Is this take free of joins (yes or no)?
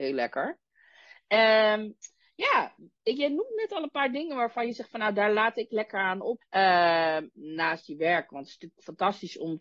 no